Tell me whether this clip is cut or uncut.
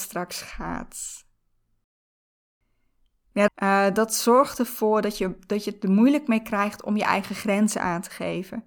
cut